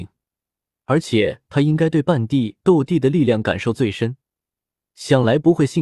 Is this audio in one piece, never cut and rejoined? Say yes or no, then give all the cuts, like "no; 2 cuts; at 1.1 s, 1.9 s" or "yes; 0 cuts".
yes; 0 cuts